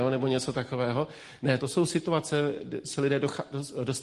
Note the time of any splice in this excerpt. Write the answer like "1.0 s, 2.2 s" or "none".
1.6 s